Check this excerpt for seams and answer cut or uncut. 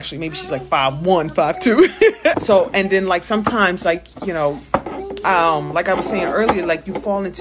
cut